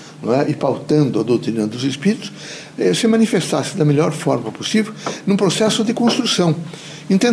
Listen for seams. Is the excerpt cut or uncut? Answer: uncut